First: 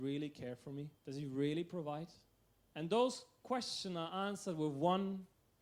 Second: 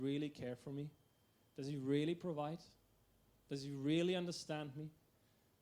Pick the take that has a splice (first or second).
first